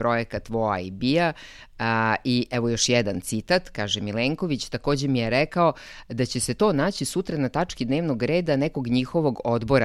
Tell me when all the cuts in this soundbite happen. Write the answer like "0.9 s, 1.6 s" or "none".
none

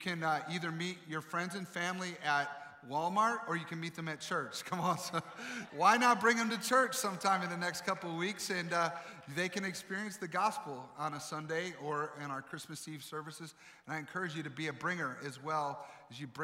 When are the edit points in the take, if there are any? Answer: 5.7 s

